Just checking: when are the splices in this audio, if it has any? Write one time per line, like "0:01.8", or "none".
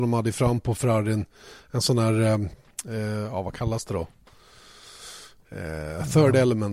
none